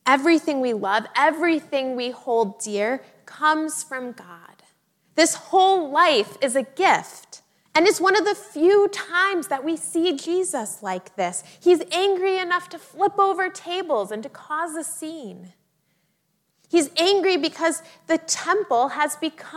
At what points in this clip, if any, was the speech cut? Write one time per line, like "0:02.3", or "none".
0:05.0
0:07.7